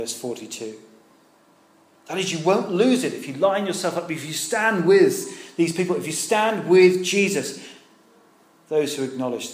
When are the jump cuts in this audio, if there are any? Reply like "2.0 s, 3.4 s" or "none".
none